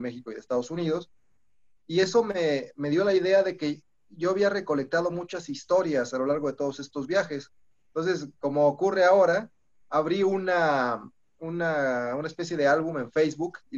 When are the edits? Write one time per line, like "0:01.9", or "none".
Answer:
0:01.8